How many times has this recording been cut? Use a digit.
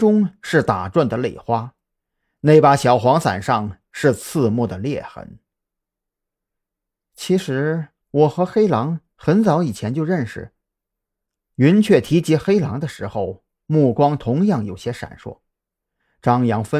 0